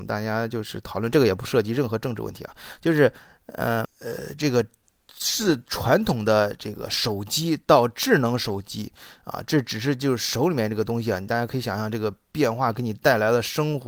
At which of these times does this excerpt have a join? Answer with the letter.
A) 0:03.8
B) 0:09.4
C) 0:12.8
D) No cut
A